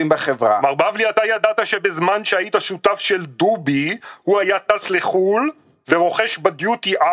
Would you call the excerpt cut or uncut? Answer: uncut